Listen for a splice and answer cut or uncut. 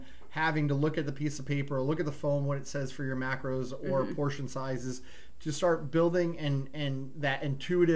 uncut